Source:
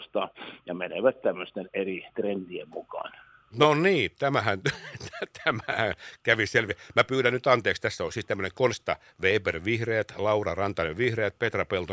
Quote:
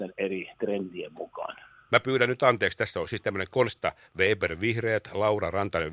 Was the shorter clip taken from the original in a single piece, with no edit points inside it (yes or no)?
no